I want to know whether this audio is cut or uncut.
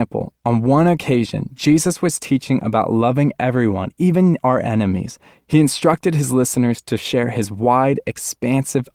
uncut